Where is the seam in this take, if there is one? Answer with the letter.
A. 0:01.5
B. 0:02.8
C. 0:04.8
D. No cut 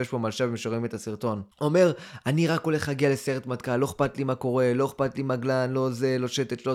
A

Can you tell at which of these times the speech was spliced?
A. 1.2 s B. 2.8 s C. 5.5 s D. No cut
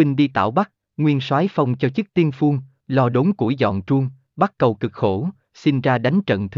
D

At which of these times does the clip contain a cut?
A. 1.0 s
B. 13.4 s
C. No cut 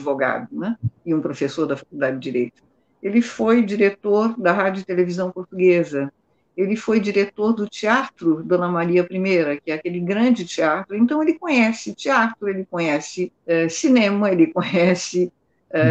B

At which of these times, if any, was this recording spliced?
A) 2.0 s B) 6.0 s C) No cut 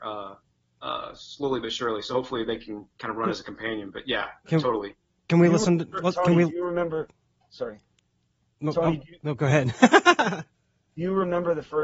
C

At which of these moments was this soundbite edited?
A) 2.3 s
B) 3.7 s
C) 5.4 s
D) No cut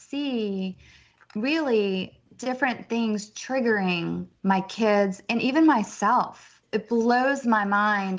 A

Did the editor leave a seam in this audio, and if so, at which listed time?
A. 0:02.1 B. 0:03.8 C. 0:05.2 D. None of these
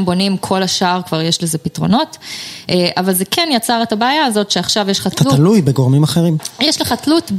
D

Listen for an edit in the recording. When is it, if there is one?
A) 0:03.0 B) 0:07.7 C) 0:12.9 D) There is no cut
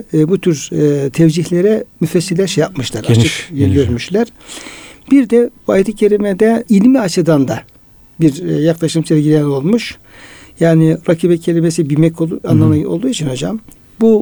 D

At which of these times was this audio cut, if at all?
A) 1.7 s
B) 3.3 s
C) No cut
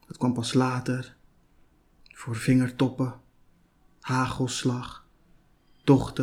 C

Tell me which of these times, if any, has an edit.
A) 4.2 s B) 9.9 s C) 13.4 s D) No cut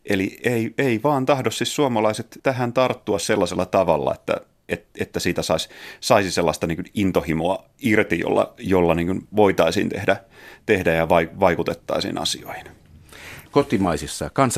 C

